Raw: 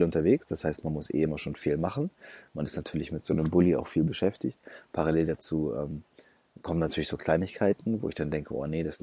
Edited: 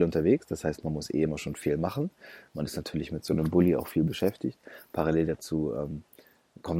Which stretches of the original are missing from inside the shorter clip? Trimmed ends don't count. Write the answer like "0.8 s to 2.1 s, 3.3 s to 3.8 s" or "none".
none